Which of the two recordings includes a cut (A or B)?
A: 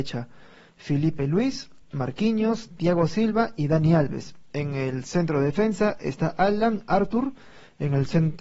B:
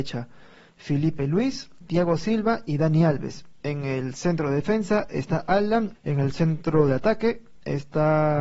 B